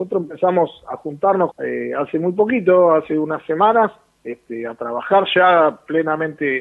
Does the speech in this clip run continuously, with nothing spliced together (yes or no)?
no